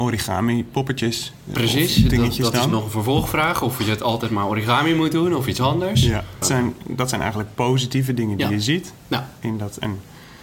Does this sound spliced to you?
yes; 1 cut; at 6.4 s

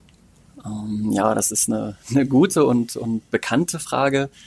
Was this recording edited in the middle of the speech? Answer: no; 0 cuts

